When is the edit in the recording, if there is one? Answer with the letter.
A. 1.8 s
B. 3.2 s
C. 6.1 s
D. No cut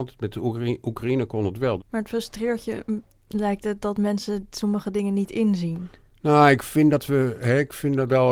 A